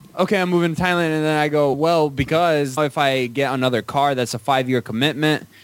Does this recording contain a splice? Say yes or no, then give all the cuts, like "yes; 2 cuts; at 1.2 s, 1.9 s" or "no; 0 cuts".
yes; 2 cuts; at 1.7 s, 2.8 s